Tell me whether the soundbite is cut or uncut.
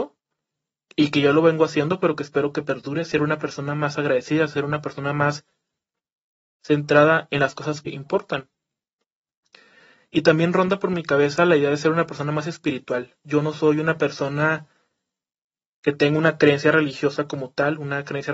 cut